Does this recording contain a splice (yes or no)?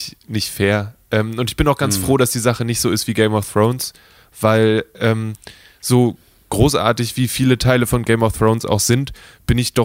no